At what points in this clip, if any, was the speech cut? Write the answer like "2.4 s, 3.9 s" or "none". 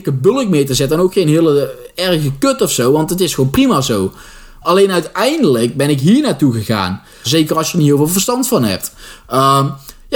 4.6 s, 7.2 s

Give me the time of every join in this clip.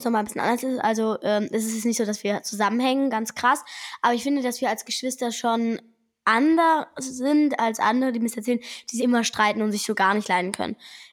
9.0 s

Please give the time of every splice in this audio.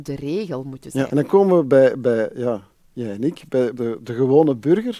1.1 s, 3.7 s

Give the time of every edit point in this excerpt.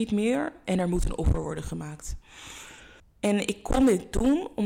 3.0 s

